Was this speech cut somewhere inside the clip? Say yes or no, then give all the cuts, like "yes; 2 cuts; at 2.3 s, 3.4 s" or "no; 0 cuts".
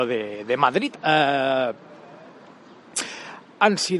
yes; 1 cut; at 0.9 s